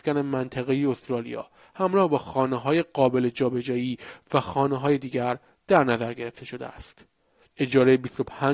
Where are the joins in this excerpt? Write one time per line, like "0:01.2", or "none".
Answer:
0:07.5

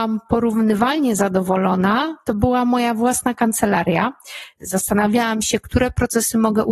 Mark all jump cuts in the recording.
0:04.6

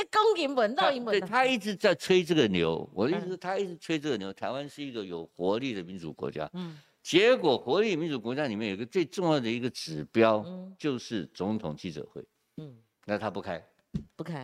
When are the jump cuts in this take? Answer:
none

